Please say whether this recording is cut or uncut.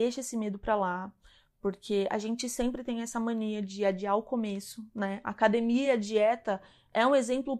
uncut